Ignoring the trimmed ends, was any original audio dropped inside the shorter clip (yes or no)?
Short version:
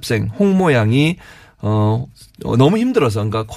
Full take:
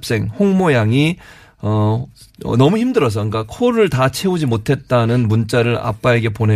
no